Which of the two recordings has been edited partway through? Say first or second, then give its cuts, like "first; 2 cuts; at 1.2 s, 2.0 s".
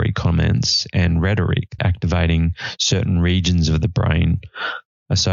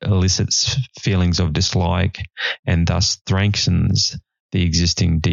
first; 1 cut; at 1.8 s